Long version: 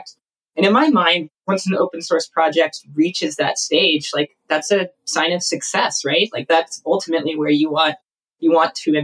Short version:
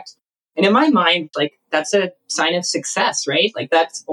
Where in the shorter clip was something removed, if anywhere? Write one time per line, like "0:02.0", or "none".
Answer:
0:01.3